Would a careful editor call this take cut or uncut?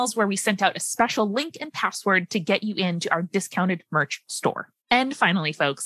cut